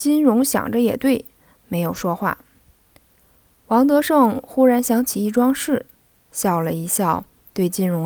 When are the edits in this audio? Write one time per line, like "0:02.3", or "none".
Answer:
none